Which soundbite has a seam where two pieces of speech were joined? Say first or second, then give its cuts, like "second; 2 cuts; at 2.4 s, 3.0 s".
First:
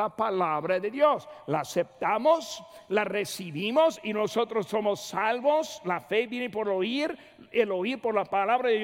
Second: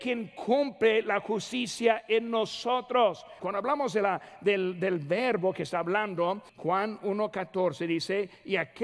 second; 2 cuts; at 3.4 s, 6.5 s